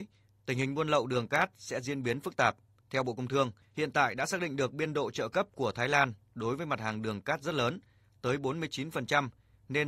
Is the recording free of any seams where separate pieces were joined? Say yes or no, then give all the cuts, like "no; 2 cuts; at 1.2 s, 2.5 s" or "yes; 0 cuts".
yes; 0 cuts